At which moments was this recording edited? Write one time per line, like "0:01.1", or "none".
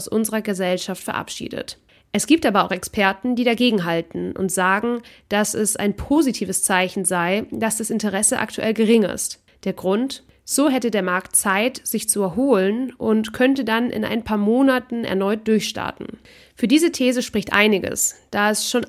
none